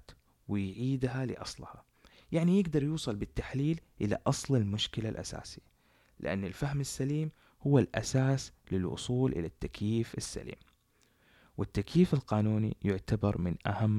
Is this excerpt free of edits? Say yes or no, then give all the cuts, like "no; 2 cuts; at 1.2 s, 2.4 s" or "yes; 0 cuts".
yes; 0 cuts